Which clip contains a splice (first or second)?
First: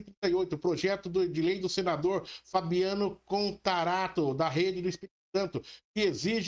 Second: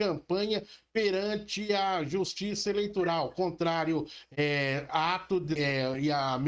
second